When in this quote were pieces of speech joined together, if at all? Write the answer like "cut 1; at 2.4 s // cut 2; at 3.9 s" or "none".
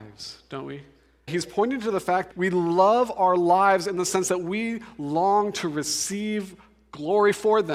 cut 1; at 1.3 s // cut 2; at 2.3 s